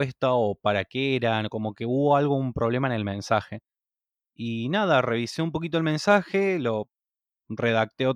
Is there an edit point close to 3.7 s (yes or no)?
no